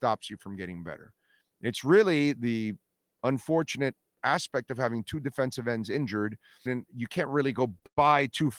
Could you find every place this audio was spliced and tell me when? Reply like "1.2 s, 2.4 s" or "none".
6.7 s